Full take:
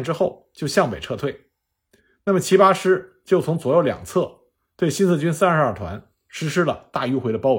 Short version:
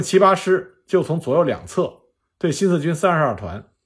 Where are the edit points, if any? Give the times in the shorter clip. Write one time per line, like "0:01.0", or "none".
none